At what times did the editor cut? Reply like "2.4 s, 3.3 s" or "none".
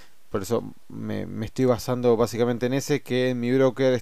none